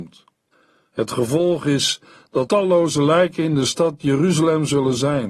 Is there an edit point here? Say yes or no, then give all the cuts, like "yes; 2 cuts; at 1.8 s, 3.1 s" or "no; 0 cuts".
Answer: yes; 1 cut; at 2.5 s